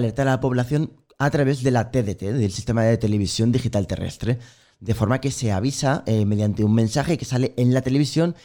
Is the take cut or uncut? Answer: uncut